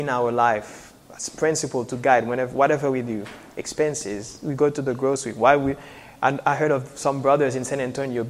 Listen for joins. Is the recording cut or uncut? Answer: uncut